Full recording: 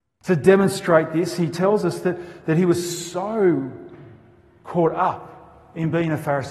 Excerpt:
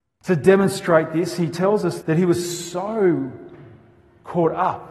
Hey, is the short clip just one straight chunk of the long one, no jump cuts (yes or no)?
no